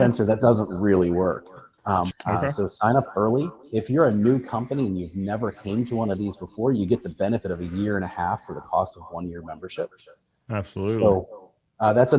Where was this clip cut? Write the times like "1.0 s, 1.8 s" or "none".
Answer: 2.1 s